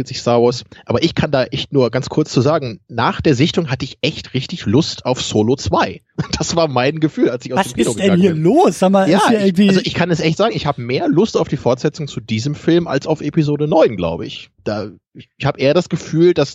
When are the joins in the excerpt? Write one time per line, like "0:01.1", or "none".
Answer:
none